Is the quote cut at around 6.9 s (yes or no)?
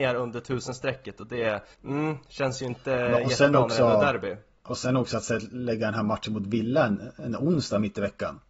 no